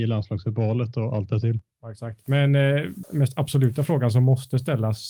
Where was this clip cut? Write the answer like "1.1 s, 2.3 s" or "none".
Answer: 3.0 s